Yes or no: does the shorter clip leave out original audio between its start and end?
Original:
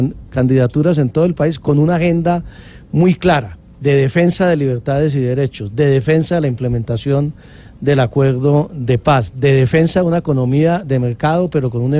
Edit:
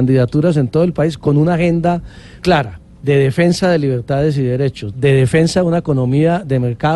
yes